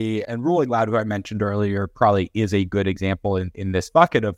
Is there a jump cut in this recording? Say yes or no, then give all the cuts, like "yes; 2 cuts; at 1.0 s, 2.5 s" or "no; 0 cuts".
no; 0 cuts